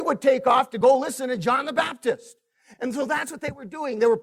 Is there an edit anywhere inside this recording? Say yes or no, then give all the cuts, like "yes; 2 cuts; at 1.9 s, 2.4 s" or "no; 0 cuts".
yes; 1 cut; at 2.7 s